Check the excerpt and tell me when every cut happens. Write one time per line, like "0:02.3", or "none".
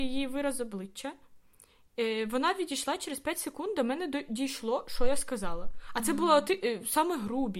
none